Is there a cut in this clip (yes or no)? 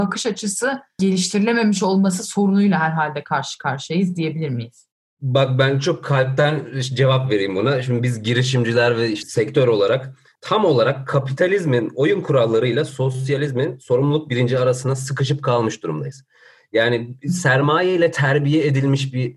no